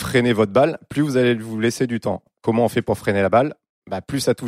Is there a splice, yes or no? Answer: no